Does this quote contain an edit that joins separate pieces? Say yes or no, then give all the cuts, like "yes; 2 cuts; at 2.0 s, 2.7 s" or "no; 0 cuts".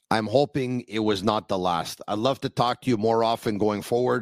no; 0 cuts